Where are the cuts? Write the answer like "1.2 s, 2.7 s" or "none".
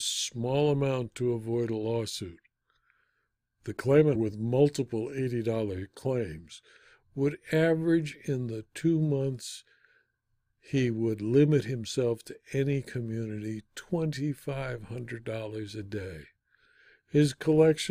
4.2 s